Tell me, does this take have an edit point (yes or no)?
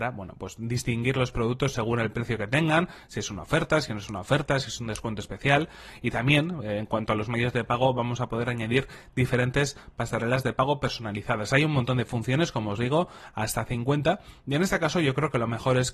no